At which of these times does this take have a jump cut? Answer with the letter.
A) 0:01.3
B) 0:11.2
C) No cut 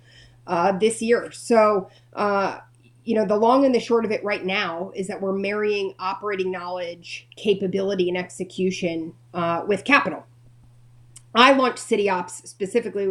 C